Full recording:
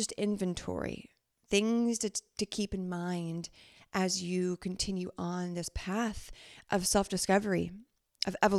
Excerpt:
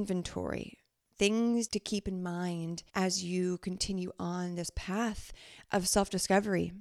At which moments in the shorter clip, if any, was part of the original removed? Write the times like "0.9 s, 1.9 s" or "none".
1.7 s, 2.9 s